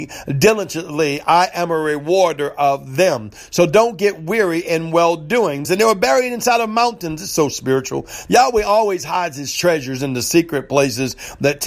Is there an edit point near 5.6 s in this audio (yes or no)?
yes